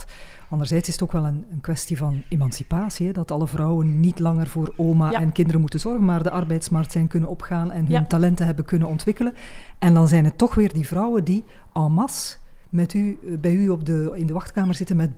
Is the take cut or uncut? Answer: cut